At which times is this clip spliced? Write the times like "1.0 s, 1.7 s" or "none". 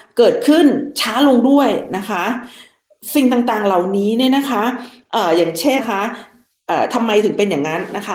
5.8 s